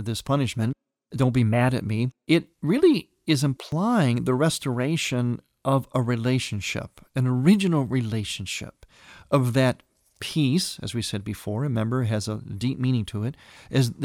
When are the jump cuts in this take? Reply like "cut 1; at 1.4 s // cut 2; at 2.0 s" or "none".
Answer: none